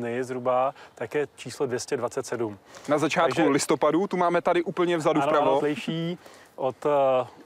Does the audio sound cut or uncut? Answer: cut